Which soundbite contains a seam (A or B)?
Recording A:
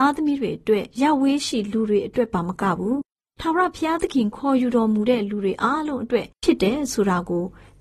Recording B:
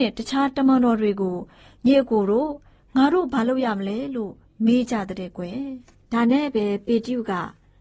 A